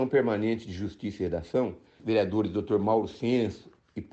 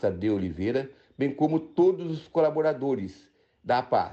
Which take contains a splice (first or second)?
first